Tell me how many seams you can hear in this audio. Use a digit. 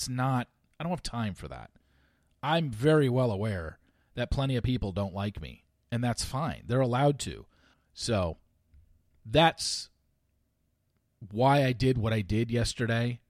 1